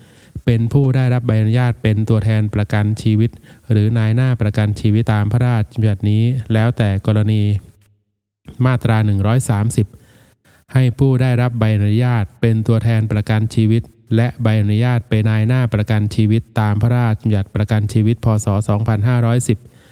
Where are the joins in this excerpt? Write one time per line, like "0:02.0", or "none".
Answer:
0:05.0
0:15.2